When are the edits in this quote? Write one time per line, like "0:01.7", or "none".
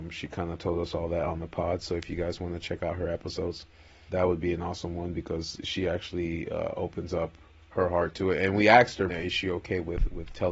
0:04.1
0:09.1